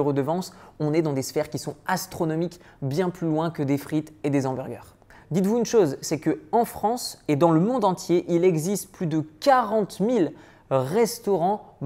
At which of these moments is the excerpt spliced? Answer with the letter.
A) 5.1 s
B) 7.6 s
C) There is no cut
A